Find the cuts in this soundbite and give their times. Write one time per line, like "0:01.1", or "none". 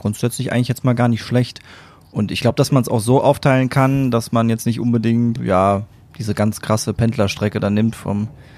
0:05.4